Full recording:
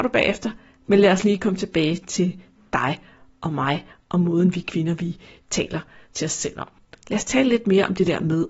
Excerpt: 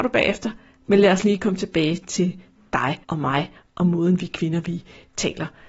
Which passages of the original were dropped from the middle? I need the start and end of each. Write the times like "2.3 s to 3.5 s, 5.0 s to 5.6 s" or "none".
3.0 s to 3.4 s

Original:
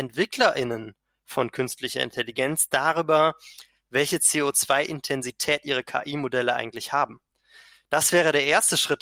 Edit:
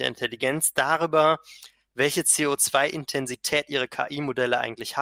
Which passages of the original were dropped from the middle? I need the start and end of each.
none

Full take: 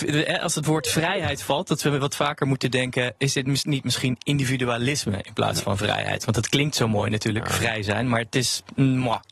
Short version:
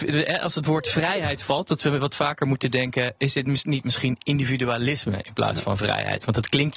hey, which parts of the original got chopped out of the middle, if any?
none

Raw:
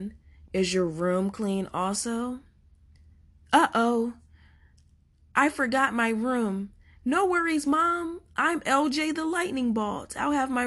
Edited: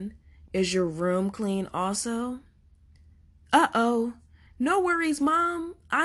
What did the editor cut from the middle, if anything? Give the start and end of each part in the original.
4.5 s to 6.9 s

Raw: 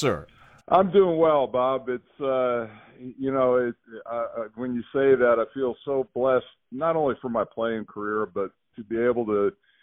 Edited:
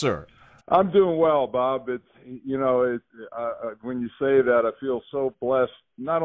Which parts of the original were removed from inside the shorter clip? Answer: 2.1 s to 2.9 s

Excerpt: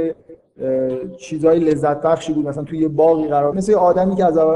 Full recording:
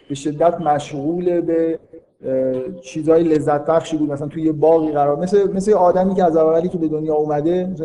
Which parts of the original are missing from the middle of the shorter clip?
5.2 s to 5.5 s

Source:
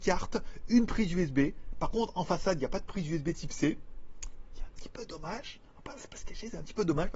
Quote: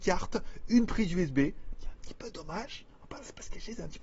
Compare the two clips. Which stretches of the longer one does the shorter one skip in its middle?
1.7 s to 4.5 s

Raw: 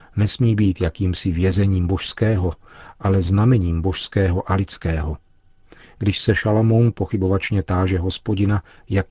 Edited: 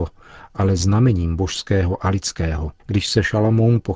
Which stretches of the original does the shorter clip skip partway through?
5.3 s to 5.9 s

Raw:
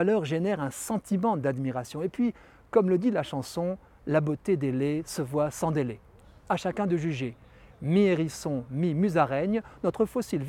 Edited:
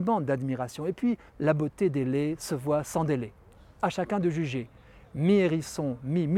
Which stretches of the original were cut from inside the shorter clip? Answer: 2.4 s to 3.9 s

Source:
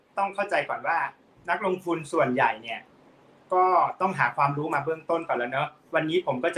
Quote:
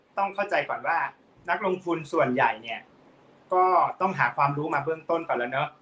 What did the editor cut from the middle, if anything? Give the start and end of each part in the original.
none

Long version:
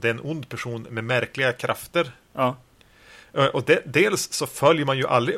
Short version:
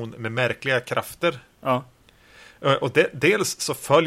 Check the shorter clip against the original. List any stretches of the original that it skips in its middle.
none

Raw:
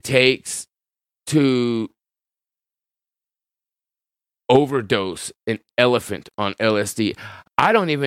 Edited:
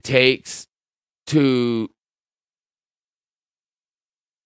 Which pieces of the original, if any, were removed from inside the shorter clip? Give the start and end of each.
none

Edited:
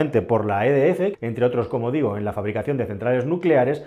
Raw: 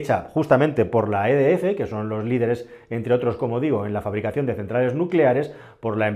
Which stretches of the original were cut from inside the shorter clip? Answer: 1.8 s to 2.8 s

